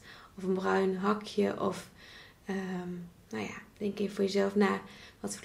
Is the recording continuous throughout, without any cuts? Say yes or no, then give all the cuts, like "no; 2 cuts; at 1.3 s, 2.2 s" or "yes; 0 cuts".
yes; 0 cuts